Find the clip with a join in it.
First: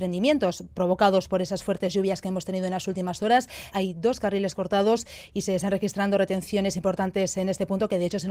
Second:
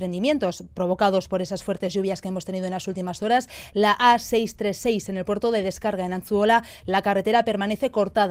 first; 1 cut; at 3.7 s

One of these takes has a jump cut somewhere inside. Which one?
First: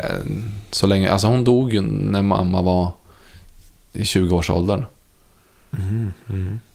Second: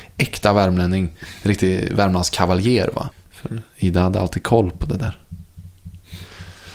second; 1 cut; at 3.1 s

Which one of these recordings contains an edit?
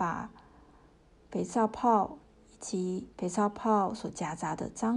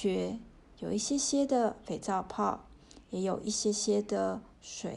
first; 1 cut; at 3.1 s

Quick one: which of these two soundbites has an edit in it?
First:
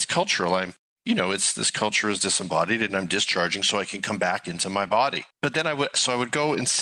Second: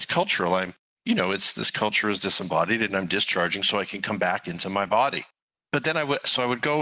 first; 1 cut; at 5.3 s

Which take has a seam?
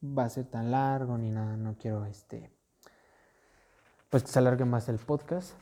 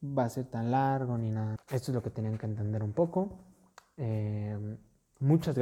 second; 1 cut; at 1.6 s

